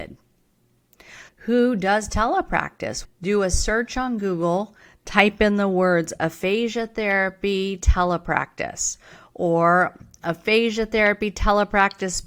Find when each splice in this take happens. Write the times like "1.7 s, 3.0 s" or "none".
1.3 s, 3.0 s